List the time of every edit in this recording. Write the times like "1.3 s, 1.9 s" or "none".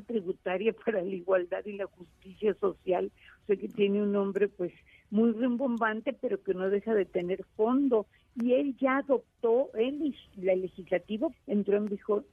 9.7 s, 11.3 s